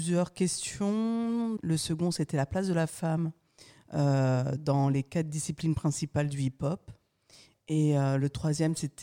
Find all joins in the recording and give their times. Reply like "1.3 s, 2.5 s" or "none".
1.6 s